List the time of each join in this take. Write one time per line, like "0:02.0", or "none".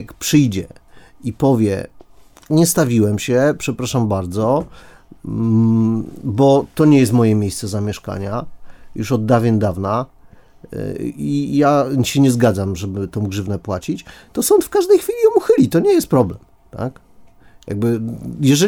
none